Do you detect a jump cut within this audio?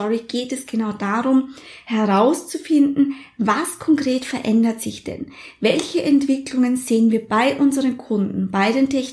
no; 0 cuts

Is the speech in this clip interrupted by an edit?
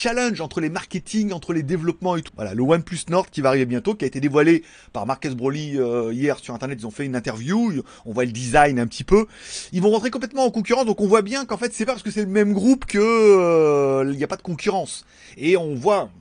yes; 1 cut; at 2.3 s

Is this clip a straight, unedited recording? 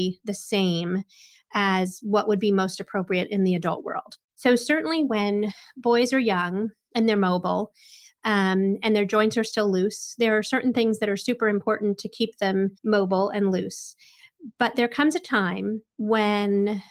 no; 1 cut; at 12.8 s

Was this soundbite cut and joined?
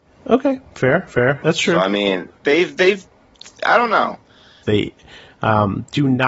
yes; 2 cuts; at 1.4 s, 4.6 s

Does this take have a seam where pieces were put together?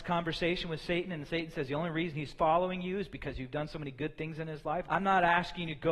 yes; 1 cut; at 4.9 s

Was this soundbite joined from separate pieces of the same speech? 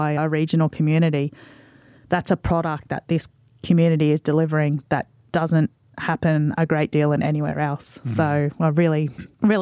no; 0 cuts

